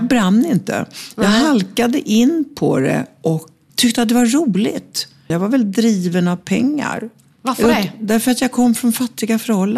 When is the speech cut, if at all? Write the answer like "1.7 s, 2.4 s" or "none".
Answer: 3.7 s, 5.3 s

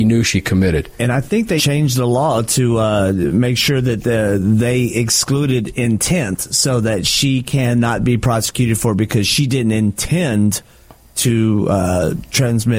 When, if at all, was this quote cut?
1.6 s

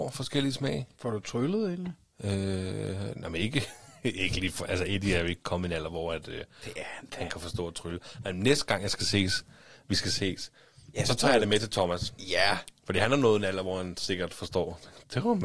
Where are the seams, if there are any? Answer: none

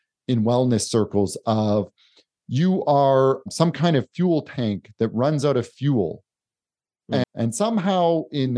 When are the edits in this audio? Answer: 7.2 s

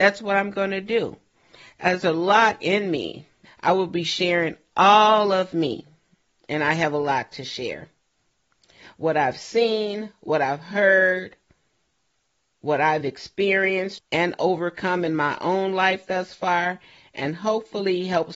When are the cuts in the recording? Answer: 3.4 s, 14.0 s

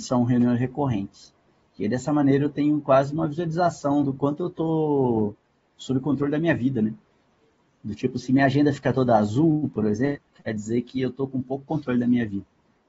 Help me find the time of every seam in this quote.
none

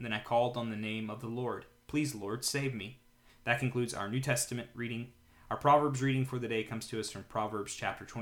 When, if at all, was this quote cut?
3.3 s

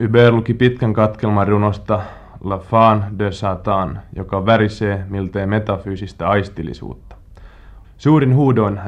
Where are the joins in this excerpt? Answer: 7.8 s

